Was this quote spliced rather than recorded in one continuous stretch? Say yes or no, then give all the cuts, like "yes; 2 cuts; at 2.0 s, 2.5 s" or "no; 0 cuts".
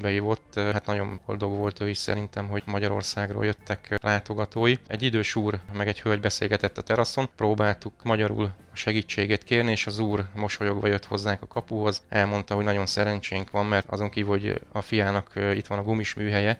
yes; 1 cut; at 4.9 s